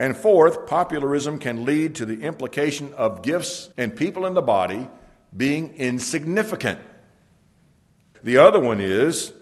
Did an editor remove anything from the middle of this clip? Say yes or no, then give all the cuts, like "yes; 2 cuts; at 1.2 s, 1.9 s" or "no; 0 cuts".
yes; 2 cuts; at 3.7 s, 8.1 s